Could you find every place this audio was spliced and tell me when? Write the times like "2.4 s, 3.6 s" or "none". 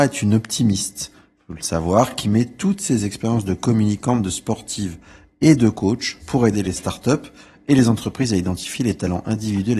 none

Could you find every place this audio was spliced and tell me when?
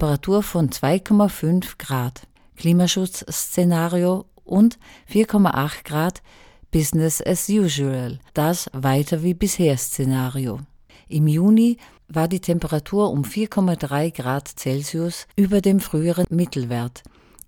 8.3 s, 10.9 s, 15.3 s

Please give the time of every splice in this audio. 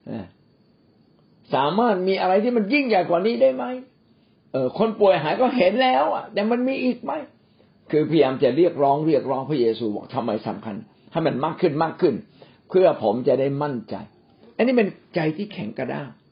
none

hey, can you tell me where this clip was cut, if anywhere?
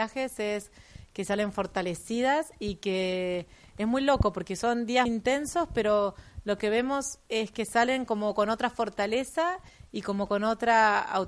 5.1 s, 7.2 s

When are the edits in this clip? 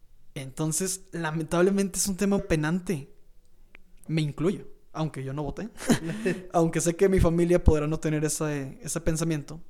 2.4 s, 4.1 s

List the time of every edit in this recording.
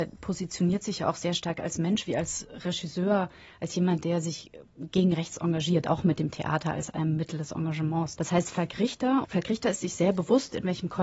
8.2 s, 9.2 s

